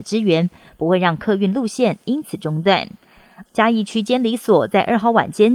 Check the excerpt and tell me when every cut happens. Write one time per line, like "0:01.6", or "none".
0:03.5